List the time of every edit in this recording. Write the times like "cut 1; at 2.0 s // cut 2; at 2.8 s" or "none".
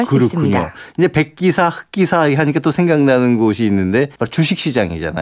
cut 1; at 4.2 s